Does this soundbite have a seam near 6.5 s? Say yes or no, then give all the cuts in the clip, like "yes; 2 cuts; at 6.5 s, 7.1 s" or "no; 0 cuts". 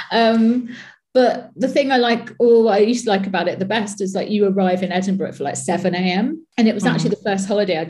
yes; 1 cut; at 6.5 s